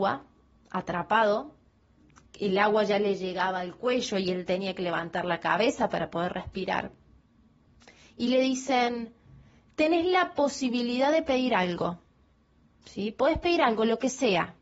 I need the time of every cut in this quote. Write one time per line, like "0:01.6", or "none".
none